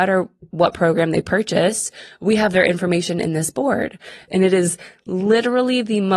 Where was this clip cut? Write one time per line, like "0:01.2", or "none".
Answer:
0:04.3